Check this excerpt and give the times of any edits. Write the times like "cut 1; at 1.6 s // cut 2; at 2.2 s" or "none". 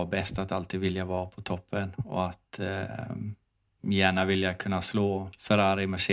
none